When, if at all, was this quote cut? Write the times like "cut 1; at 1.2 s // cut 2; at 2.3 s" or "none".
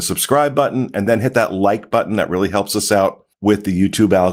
cut 1; at 3.3 s